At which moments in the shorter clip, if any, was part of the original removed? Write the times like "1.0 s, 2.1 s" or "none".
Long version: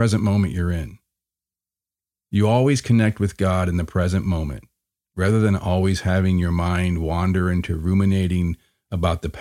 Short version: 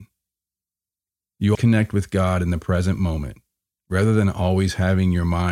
1.6 s